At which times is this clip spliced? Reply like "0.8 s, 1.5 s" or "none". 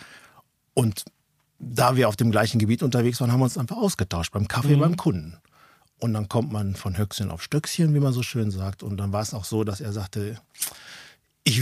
none